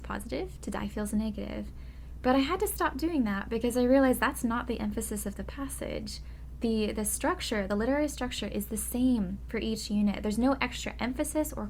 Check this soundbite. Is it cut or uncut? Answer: uncut